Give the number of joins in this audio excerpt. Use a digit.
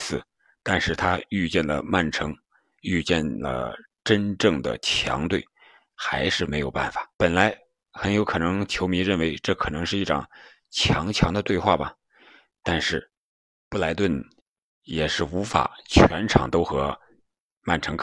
1